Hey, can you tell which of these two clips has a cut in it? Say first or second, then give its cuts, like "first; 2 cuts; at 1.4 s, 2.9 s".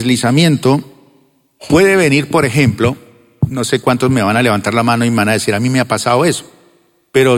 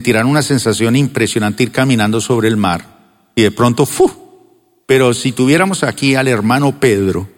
second; 1 cut; at 4.8 s